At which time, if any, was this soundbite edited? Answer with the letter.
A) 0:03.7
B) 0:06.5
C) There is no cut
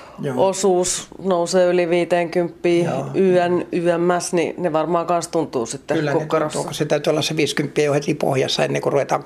A